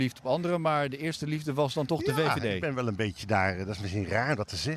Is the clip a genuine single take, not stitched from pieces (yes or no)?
yes